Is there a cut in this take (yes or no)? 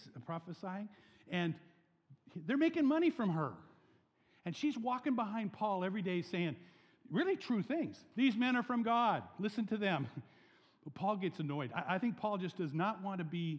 no